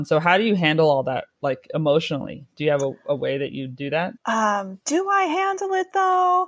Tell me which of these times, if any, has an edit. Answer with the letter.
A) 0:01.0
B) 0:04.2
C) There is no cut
B